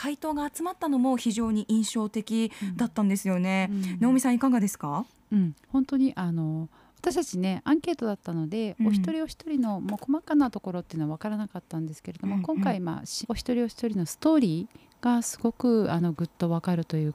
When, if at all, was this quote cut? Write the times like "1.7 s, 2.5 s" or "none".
5.6 s, 13.2 s